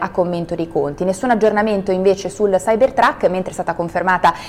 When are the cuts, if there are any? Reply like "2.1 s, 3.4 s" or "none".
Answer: none